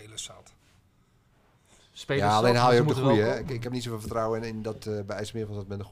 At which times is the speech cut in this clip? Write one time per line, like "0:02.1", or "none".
none